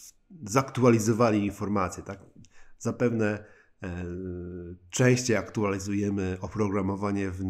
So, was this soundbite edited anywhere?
no; 0 cuts

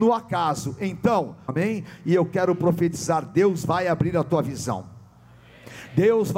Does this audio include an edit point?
yes; 1 cut; at 1.5 s

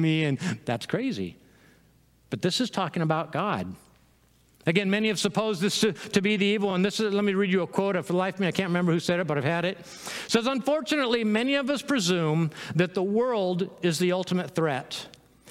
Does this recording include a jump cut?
no; 0 cuts

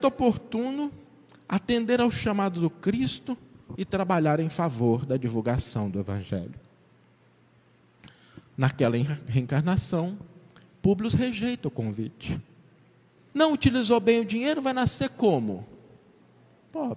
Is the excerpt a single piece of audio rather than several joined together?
no; 1 cut; at 13.3 s

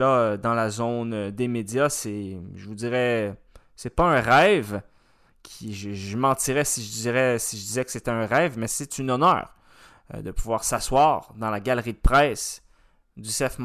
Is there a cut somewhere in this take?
no; 0 cuts

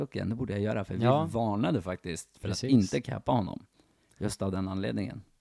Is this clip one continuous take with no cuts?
yes; 0 cuts

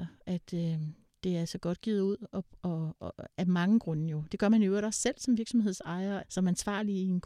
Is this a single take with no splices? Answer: no; 2 cuts; at 4.3 s, 6.2 s

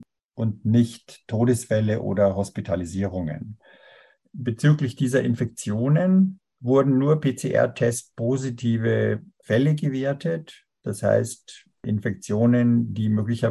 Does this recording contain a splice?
no; 0 cuts

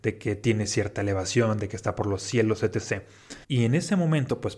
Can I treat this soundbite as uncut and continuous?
no; 1 cut; at 3.4 s

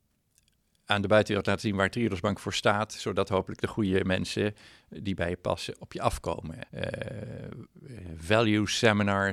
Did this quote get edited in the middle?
yes; 1 cut; at 6.6 s

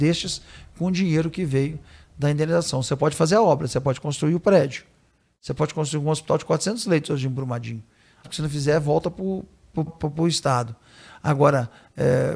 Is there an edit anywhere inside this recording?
yes; 2 cuts; at 8.2 s, 9.9 s

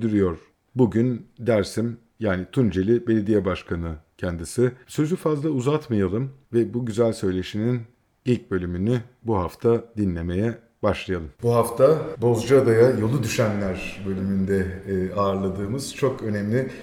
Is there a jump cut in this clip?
yes; 1 cut; at 11.3 s

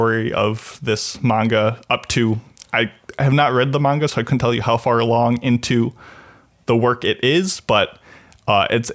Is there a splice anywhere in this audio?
no; 0 cuts

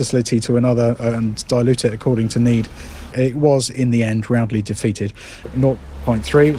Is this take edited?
yes; 2 cuts; at 3.1 s, 5.4 s

